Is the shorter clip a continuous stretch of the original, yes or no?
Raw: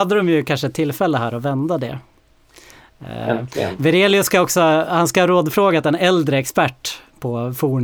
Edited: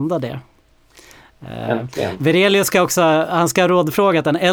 yes